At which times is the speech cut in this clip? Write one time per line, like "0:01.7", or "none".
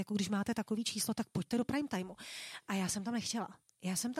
none